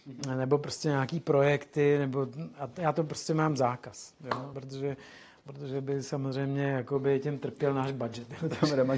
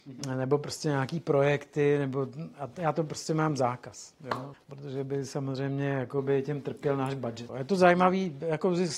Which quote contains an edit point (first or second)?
second